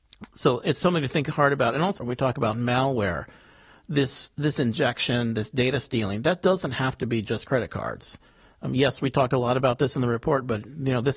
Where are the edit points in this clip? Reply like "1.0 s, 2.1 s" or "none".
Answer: 2.0 s